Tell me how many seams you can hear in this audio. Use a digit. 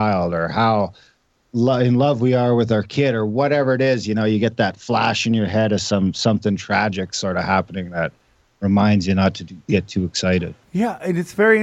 1